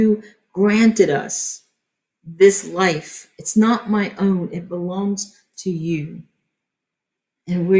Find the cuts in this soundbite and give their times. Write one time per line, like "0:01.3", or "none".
none